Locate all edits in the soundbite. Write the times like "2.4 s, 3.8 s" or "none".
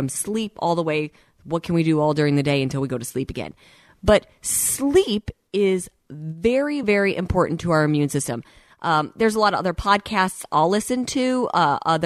none